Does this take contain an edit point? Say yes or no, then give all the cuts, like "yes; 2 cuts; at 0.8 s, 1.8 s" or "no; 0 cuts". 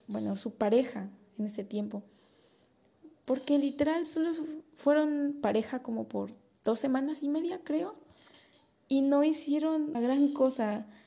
yes; 1 cut; at 9.9 s